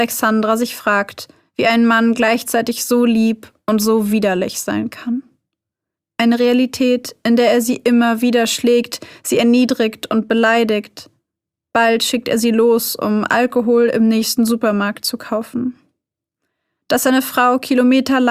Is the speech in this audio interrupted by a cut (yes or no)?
no